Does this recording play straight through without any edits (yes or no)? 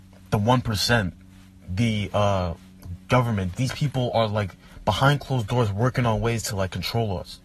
no